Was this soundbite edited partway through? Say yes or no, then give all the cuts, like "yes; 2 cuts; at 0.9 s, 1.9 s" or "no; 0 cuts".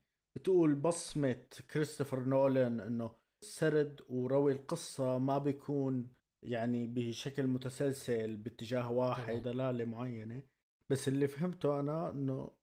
yes; 1 cut; at 9.4 s